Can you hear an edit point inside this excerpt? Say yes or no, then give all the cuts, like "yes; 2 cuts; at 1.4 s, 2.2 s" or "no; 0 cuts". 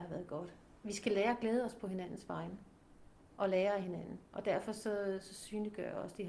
yes; 1 cut; at 4.3 s